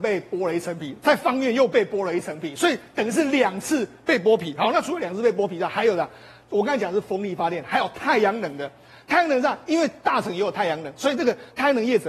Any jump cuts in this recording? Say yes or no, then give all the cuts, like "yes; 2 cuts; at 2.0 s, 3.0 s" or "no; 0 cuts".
no; 0 cuts